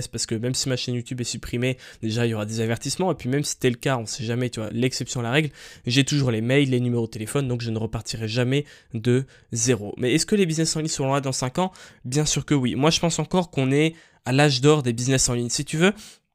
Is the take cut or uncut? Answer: uncut